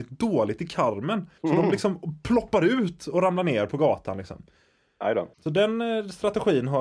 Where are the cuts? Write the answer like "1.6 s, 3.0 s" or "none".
1.4 s, 5.3 s